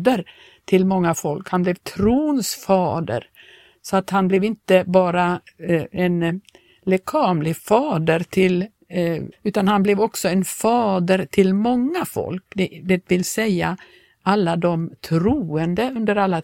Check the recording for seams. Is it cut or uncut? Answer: cut